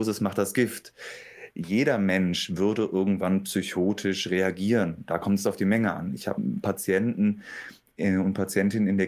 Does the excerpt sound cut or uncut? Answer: uncut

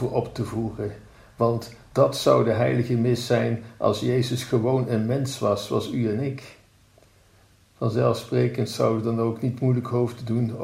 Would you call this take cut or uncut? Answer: uncut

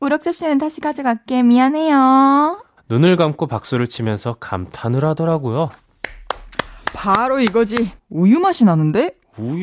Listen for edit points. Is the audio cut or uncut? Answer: cut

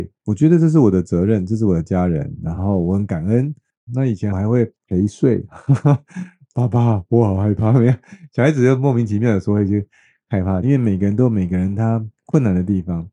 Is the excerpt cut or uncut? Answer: cut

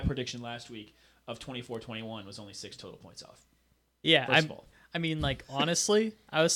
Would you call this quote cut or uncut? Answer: uncut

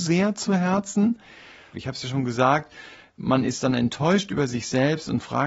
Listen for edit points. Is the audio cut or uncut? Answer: cut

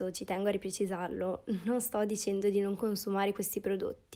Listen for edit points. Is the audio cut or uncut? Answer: uncut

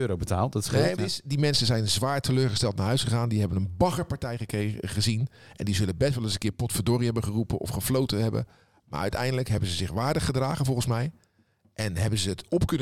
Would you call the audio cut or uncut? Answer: cut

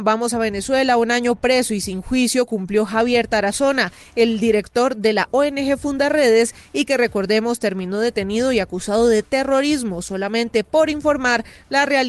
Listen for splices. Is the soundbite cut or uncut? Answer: uncut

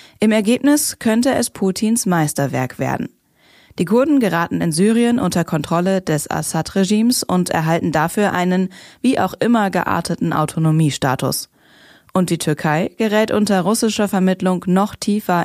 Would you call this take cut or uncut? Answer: uncut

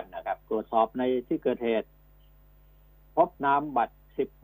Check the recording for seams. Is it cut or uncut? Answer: cut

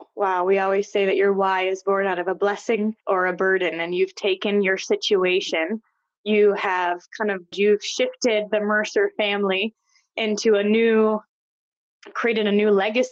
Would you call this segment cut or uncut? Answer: cut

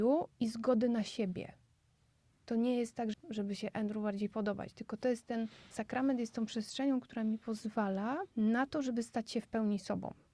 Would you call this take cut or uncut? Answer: cut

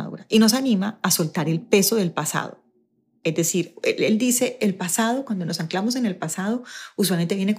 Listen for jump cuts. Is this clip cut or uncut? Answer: uncut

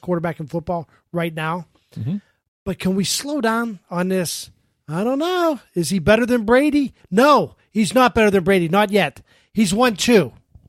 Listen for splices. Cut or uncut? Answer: uncut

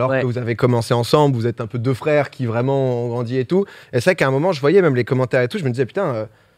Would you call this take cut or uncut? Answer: uncut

